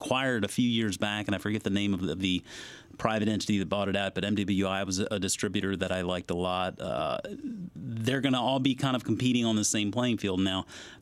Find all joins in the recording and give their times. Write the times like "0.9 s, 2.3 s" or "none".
none